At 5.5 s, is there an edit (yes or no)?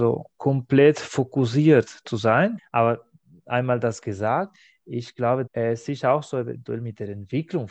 yes